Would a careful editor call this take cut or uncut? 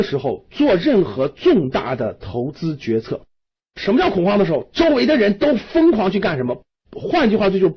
uncut